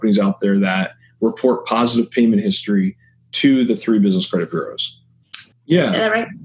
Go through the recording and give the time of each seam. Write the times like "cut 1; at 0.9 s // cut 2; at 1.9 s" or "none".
cut 1; at 5.5 s